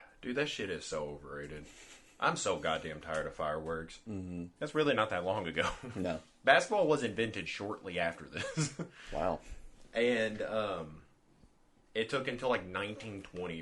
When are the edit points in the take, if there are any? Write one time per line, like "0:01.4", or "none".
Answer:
0:04.6